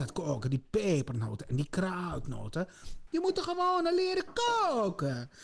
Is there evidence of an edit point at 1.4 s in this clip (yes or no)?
no